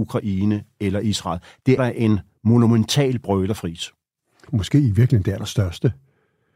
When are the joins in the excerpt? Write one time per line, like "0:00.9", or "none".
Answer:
0:01.8
0:04.5